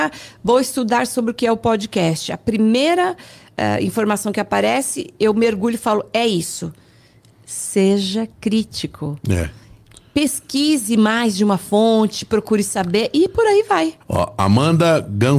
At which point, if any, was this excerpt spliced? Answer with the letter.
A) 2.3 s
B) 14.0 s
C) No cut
B